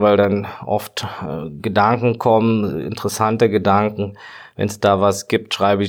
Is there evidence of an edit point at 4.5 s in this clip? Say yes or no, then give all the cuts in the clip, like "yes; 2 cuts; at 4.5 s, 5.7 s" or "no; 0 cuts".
no; 0 cuts